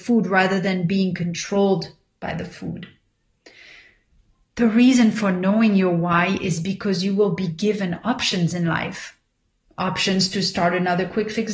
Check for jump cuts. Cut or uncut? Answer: uncut